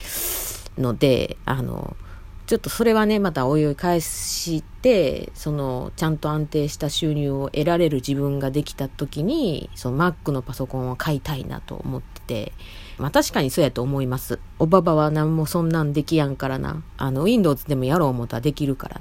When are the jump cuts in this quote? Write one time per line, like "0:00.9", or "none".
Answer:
0:13.0
0:14.5
0:16.9